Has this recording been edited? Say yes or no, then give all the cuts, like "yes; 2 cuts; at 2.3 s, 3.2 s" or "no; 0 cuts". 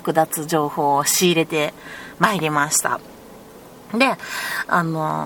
no; 0 cuts